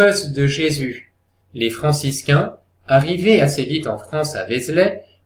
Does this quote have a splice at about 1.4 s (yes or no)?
yes